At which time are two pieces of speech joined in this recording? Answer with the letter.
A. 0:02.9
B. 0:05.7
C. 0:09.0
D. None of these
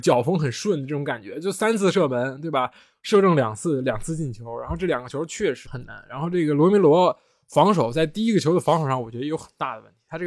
B